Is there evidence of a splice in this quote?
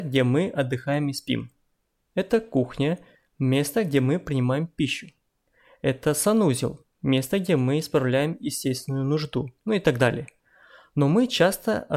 no; 0 cuts

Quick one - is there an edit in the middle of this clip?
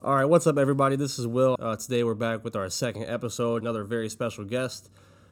yes; 2 cuts; at 1.6 s, 3.6 s

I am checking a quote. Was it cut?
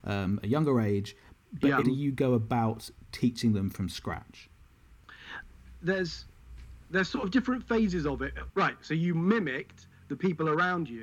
yes; 2 cuts; at 1.8 s, 8.5 s

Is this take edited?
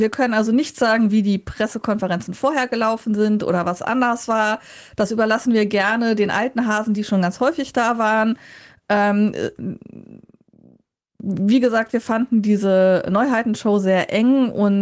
no; 0 cuts

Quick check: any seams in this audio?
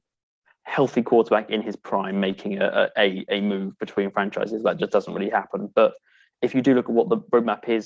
no; 0 cuts

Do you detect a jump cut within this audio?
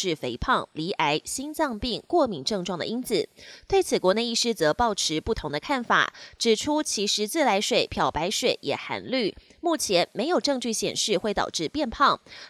no; 0 cuts

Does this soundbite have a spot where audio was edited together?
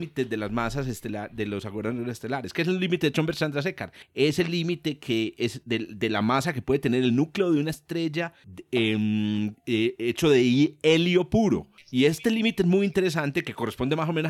no; 0 cuts

